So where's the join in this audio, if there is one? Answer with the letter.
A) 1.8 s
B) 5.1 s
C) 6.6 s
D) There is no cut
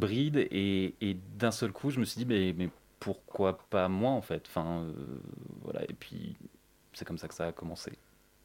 D